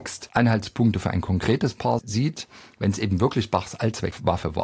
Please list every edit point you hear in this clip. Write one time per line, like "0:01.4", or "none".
none